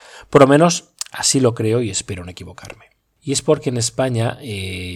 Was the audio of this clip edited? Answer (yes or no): yes